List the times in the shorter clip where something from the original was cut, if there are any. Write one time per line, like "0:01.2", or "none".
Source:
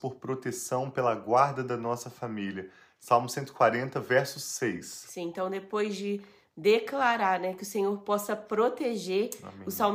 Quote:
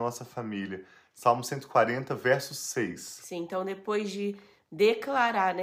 none